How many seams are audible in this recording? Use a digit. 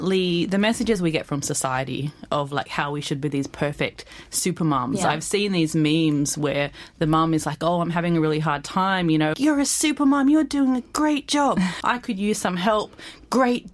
2